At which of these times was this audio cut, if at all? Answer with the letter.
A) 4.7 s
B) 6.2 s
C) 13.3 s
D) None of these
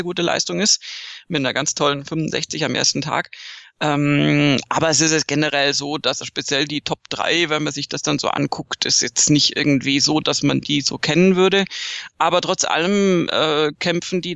B